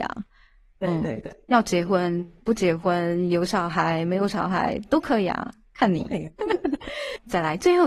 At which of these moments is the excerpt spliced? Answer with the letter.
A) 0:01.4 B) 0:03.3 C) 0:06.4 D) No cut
C